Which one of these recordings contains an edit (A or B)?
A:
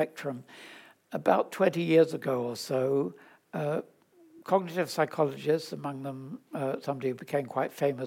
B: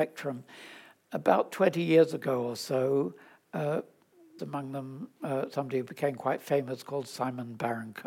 B